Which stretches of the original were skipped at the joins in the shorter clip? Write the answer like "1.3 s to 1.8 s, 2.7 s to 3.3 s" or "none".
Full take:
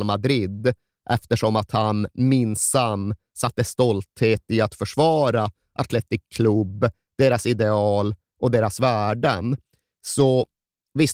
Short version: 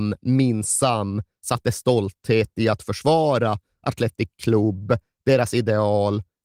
none